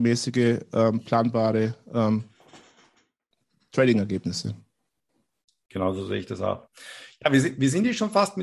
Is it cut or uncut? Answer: uncut